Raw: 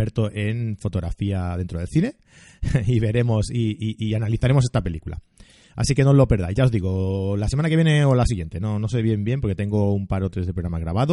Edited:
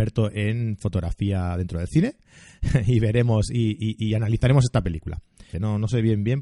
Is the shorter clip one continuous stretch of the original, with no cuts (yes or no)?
no